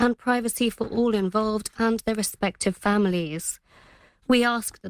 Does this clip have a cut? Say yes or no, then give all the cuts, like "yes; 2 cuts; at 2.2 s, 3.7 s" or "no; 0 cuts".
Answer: no; 0 cuts